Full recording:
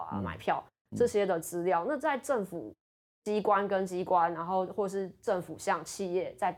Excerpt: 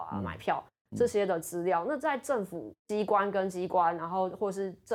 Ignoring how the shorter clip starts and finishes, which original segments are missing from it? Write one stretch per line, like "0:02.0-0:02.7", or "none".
0:02.8-0:03.2